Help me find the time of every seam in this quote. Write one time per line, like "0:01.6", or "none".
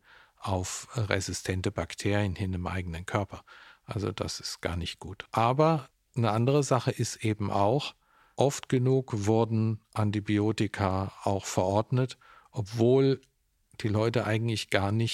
none